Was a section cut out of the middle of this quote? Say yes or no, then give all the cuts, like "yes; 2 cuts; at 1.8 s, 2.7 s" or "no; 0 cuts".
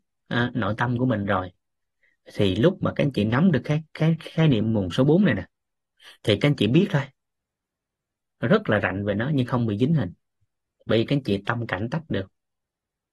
no; 0 cuts